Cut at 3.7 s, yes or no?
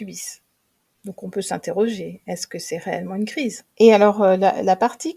yes